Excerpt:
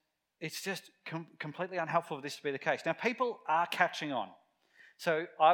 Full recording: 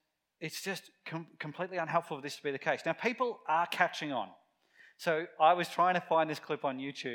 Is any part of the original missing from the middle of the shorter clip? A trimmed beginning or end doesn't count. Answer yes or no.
no